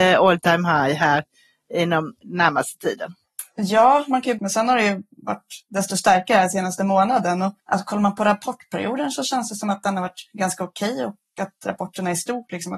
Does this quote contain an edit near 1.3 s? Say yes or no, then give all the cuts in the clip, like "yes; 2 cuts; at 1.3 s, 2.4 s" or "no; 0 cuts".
no; 2 cuts; at 4.4 s, 7.6 s